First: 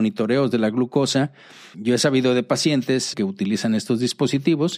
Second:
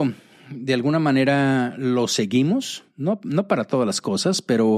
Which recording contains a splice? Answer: first; 2 cuts; at 1.7 s, 3.1 s

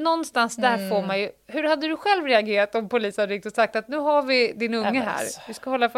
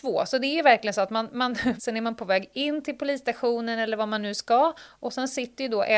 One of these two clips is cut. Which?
second; 1 cut; at 1.8 s

